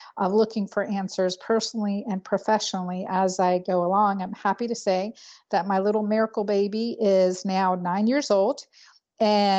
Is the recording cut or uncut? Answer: uncut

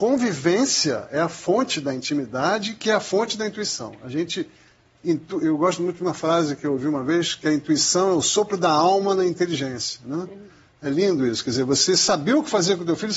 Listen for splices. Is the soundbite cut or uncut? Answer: uncut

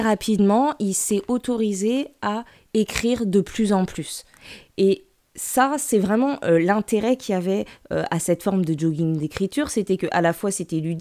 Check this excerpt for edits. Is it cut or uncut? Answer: uncut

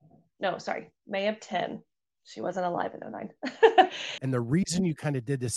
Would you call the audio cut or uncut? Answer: cut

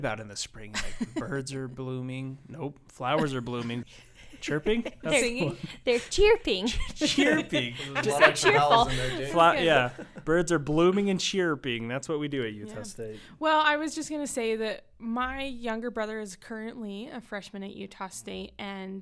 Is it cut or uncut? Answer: cut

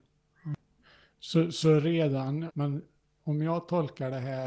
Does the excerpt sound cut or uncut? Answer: cut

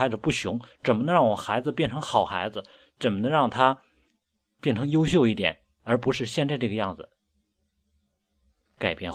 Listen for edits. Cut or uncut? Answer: uncut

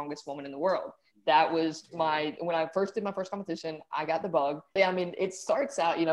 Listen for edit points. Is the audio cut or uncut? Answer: cut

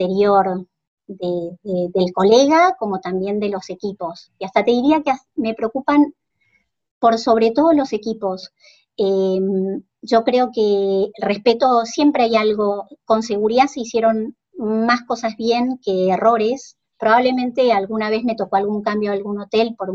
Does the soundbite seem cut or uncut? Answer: uncut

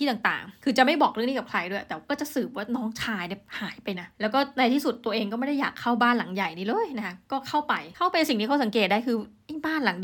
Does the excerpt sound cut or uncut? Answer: cut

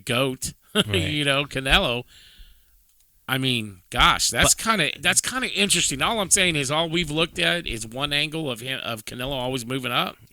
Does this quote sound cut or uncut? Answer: uncut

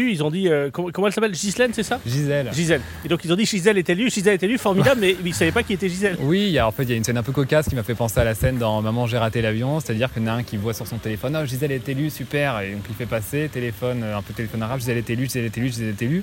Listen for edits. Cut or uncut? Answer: uncut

